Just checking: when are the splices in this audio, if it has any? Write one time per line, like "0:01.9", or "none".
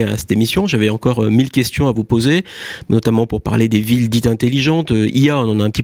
none